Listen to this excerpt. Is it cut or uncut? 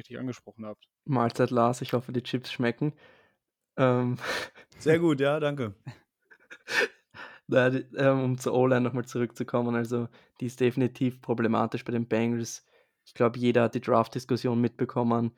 cut